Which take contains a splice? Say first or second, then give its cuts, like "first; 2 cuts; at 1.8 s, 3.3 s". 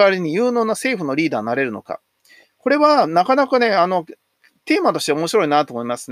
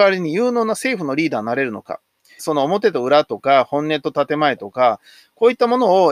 second; 1 cut; at 2.4 s